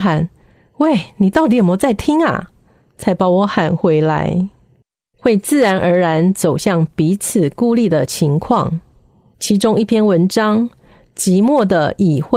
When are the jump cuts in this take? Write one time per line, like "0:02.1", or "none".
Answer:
0:05.1